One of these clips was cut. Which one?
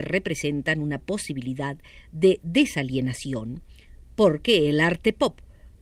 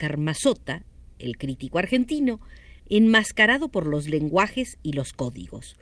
second; 1 cut; at 2.8 s

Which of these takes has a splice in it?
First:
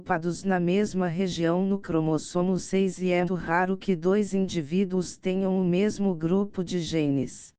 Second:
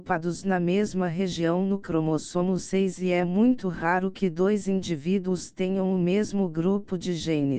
first; 1 cut; at 3.3 s

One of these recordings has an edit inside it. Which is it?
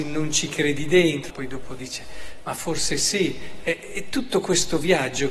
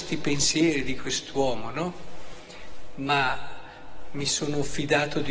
first; 1 cut; at 1.3 s

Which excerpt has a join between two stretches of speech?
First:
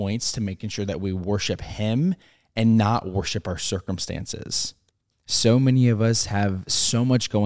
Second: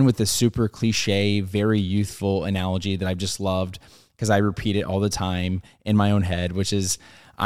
first; 1 cut; at 5.1 s

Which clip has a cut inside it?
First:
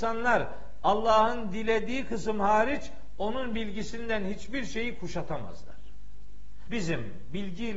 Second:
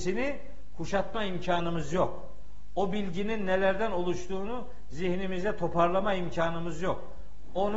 first; 1 cut; at 6.7 s

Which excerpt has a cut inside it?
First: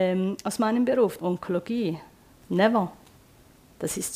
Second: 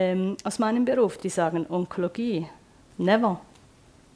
first; 1 cut; at 1.2 s

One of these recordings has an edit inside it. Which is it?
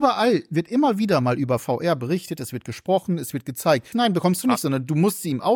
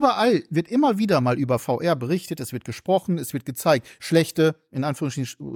first; 1 cut; at 3.9 s

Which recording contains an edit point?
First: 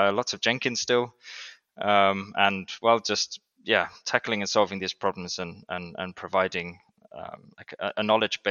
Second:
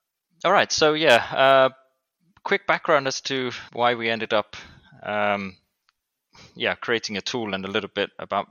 second; 1 cut; at 3.7 s

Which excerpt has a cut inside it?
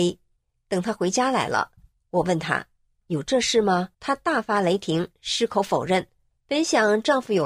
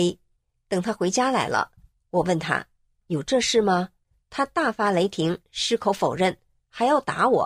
first; 2 cuts; at 3.9 s, 6.3 s

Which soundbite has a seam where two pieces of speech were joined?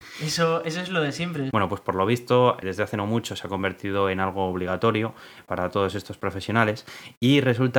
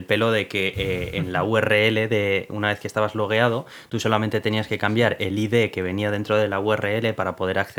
first; 3 cuts; at 1.5 s, 2.6 s, 5.5 s

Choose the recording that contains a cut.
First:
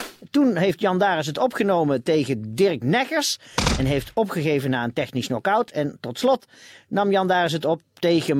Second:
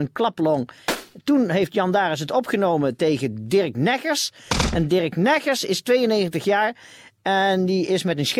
first; 1 cut; at 3.8 s

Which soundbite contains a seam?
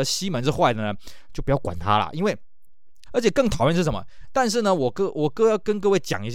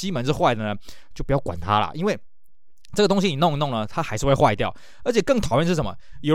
first; 2 cuts; at 3.1 s, 4.2 s

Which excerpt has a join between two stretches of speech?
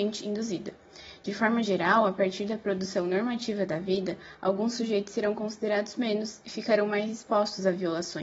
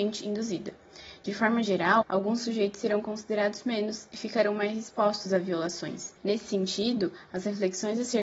second; 2 cuts; at 2.0 s, 6.2 s

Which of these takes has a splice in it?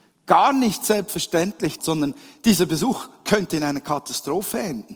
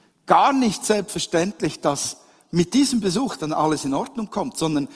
first; 1 cut; at 1.8 s

